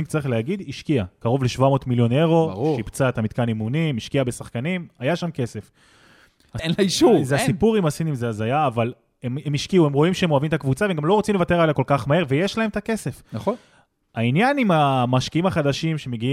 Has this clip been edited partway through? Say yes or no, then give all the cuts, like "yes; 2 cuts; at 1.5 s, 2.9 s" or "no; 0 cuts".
yes; 1 cut; at 6.6 s